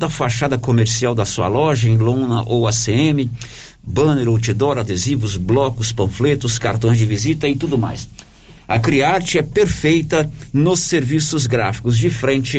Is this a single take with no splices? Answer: yes; 0 cuts

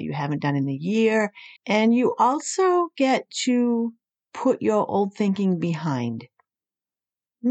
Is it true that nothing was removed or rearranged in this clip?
no; 1 cut; at 1.6 s

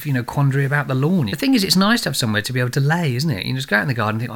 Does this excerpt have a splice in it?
yes; 1 cut; at 1.3 s

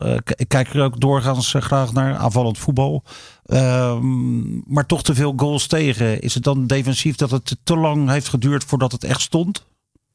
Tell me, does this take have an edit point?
no; 0 cuts

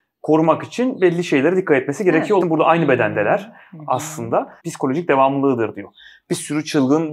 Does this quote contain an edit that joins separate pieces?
yes; 2 cuts; at 2.4 s, 4.6 s

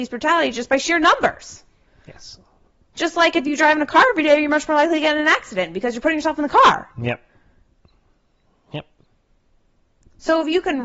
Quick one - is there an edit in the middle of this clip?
no; 0 cuts

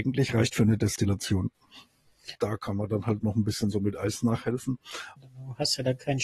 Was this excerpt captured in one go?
no; 2 cuts; at 2.3 s, 5.2 s

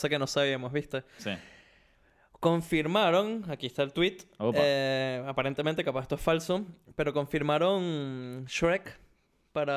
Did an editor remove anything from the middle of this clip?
no; 0 cuts

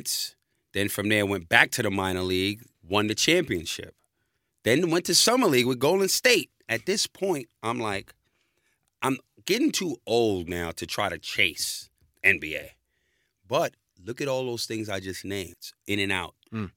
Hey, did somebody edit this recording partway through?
yes; 1 cut; at 2.7 s

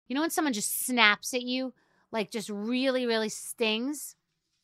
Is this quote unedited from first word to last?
yes; 0 cuts

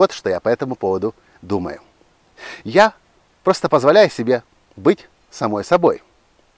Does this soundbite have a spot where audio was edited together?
no; 0 cuts

